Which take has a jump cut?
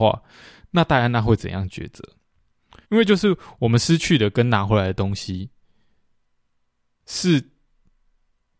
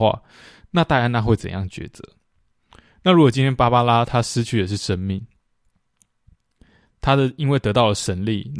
first; 1 cut; at 2.8 s

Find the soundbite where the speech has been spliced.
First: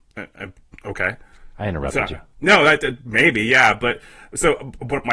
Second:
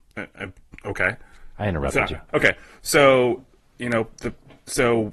second; 1 cut; at 2.3 s

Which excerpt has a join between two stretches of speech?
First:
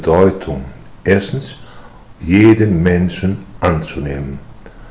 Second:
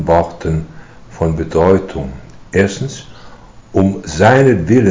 first; 1 cut; at 2.2 s

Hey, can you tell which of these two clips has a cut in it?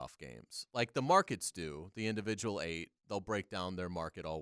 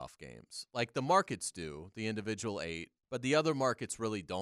second; 1 cut; at 3.0 s

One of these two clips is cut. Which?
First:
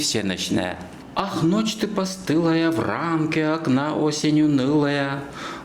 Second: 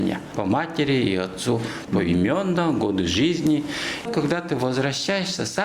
second; 1 cut; at 4.0 s

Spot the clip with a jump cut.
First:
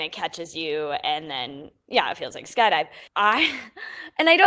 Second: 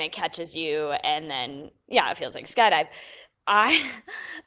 first; 1 cut; at 3.1 s

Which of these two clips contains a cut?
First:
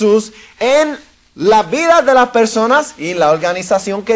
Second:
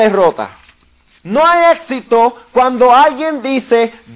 second; 1 cut; at 1.2 s

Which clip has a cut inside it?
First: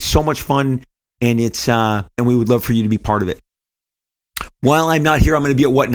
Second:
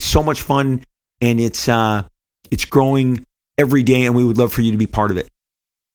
first; 1 cut; at 2.2 s

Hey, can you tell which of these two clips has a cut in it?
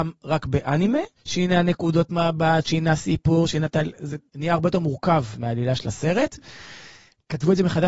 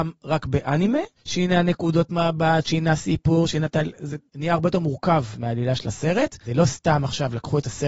first; 1 cut; at 6.4 s

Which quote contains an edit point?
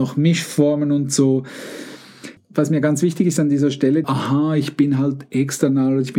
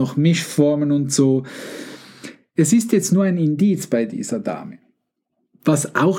first; 2 cuts; at 2.4 s, 4.0 s

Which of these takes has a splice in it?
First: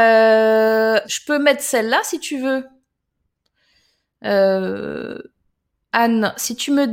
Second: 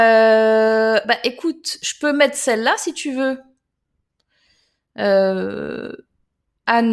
first; 1 cut; at 1.0 s

